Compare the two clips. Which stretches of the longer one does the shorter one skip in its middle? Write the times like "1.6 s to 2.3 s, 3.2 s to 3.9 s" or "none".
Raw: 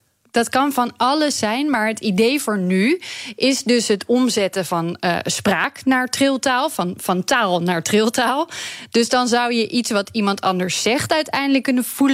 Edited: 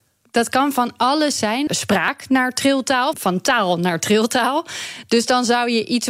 1.7 s to 5.2 s, 6.7 s to 7.0 s